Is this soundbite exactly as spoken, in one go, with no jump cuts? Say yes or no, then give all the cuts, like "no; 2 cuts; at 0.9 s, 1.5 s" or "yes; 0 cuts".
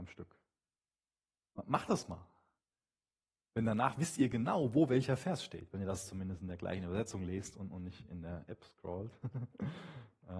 yes; 0 cuts